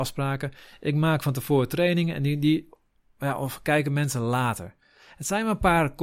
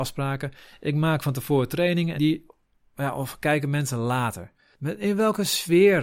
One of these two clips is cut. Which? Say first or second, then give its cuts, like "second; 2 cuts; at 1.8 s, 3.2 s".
second; 2 cuts; at 2.2 s, 4.7 s